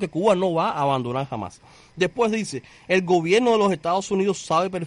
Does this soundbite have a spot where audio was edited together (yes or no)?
no